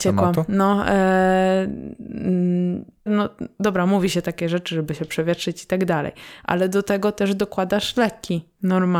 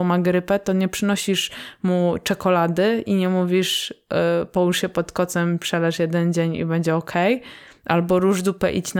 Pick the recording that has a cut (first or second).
first